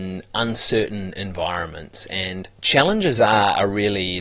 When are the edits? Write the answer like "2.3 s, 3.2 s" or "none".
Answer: 2.5 s